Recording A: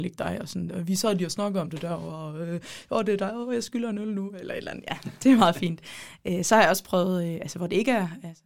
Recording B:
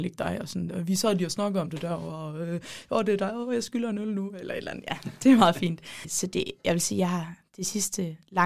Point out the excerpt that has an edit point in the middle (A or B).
B